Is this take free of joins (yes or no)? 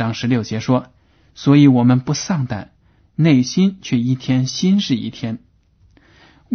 no